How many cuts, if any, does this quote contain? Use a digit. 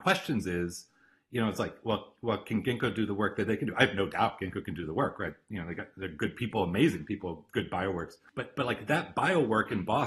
0